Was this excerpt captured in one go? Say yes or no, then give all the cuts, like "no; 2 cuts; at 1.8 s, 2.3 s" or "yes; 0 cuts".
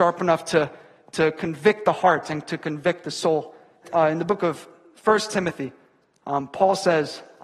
no; 1 cut; at 3.8 s